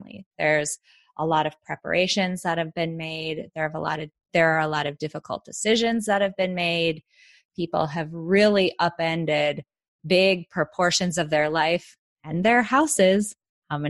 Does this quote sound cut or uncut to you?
uncut